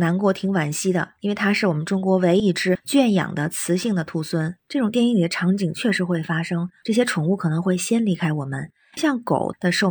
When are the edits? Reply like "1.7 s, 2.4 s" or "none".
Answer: 2.4 s, 4.6 s, 6.8 s